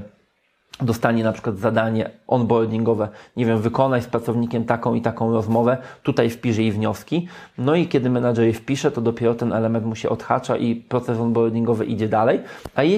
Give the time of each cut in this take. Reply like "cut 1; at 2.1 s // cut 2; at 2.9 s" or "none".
none